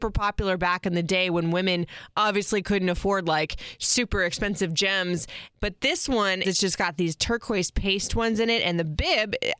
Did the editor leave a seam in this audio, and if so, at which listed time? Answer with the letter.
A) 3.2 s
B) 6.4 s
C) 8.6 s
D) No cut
B